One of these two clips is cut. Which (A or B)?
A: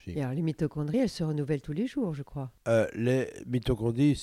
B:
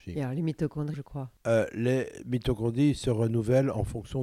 B